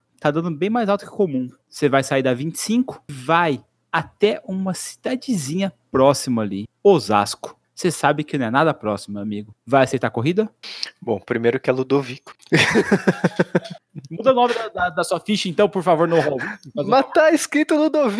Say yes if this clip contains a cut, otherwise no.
no